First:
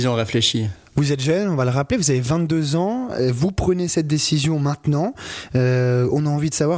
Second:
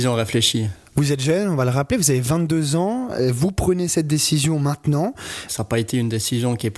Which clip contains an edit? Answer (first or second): second